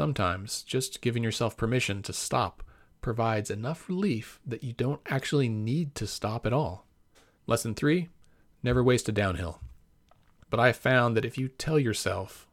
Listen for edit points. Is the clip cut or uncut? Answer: cut